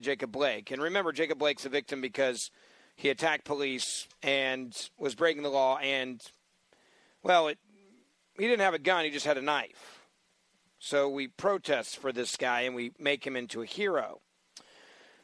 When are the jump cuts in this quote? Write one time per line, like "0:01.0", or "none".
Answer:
none